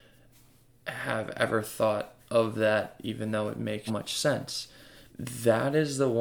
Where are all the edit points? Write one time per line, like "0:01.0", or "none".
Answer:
0:03.9
0:05.1